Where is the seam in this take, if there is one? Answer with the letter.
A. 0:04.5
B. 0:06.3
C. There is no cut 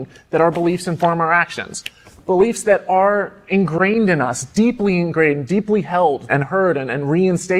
B